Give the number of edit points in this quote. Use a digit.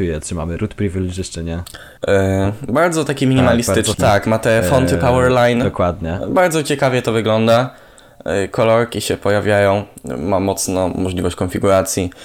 2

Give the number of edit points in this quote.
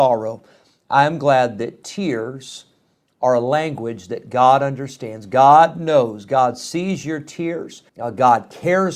1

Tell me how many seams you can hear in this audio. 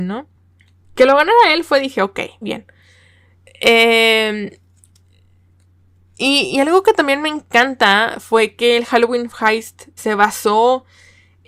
2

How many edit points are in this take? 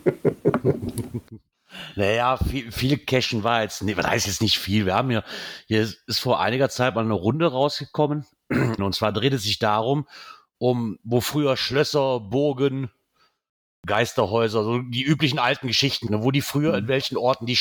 2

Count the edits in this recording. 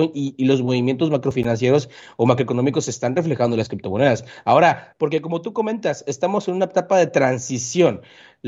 1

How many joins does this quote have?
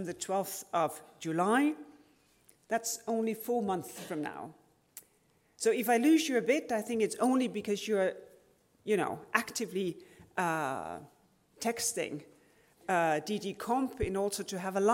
0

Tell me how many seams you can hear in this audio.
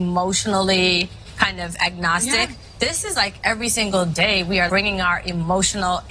1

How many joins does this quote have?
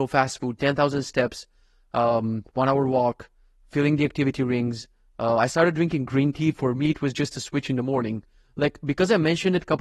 0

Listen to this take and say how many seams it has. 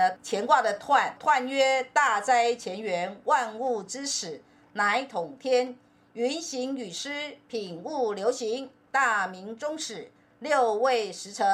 0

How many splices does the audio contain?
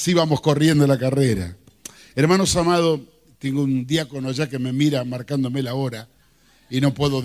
0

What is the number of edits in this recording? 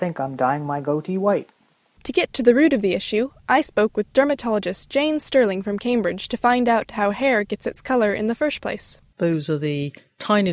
2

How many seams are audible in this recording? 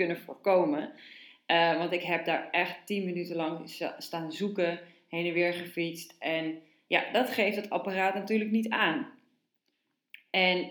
1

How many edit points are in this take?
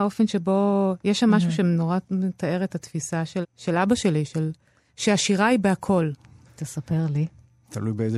2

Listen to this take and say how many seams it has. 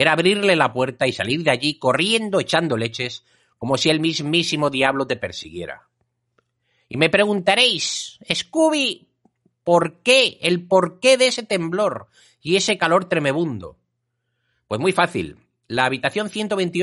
0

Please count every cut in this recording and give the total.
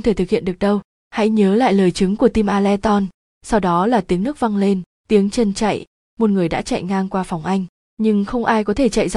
2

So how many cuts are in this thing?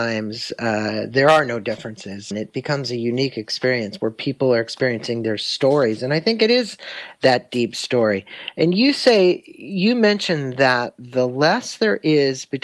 1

